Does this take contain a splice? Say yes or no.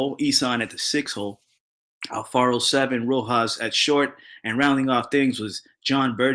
no